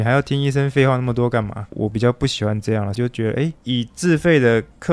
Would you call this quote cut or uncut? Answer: cut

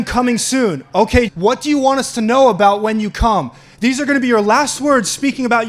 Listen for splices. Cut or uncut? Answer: cut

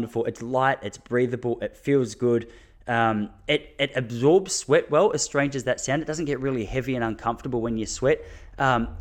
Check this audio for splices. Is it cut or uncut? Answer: uncut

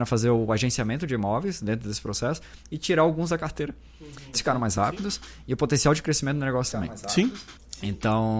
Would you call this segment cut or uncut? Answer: cut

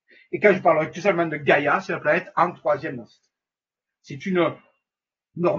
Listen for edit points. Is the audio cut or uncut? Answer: uncut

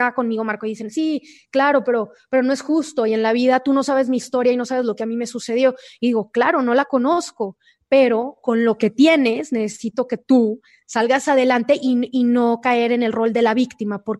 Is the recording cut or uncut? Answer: uncut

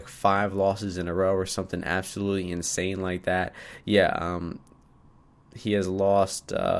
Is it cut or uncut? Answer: uncut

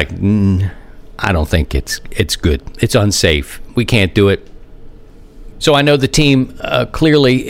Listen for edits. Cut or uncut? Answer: cut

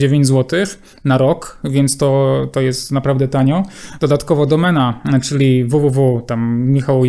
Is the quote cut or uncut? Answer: uncut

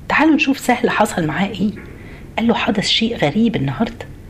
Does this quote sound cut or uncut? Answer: cut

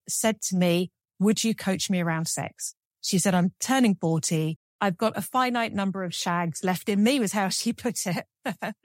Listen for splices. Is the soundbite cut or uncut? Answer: uncut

